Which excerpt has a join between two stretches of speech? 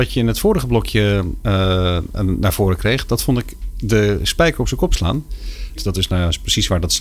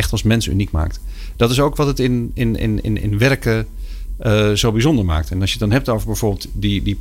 first; 1 cut; at 5.8 s

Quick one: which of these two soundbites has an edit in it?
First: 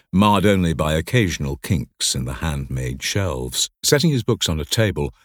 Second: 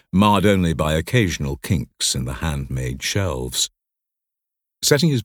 first; 1 cut; at 3.7 s

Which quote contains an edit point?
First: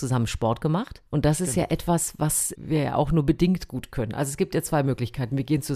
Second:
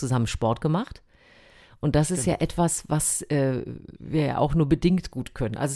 first; 2 cuts; at 1.1 s, 2.5 s

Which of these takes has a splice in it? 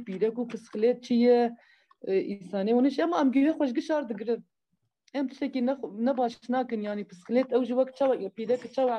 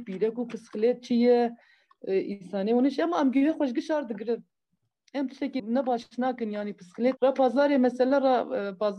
second; 2 cuts; at 5.6 s, 7.2 s

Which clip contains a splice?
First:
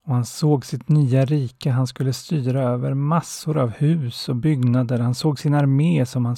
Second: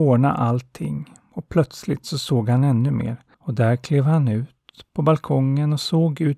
second; 1 cut; at 3.3 s

